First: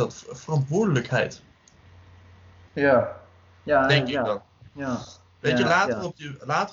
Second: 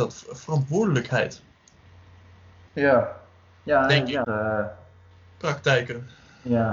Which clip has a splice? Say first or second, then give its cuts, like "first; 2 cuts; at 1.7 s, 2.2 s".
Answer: second; 1 cut; at 4.2 s